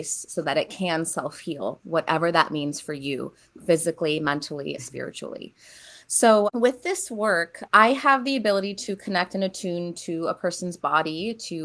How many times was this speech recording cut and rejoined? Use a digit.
1